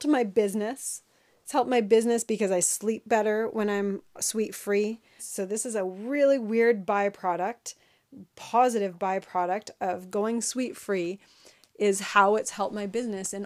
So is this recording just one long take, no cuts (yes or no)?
no